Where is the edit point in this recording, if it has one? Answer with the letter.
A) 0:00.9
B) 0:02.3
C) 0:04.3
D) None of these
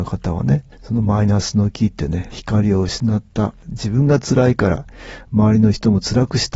B